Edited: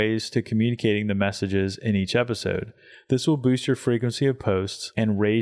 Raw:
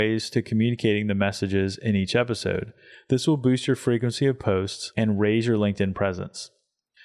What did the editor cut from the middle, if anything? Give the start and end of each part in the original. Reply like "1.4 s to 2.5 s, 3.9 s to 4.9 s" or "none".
none